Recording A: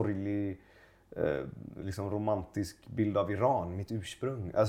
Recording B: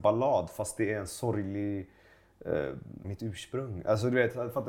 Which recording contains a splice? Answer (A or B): B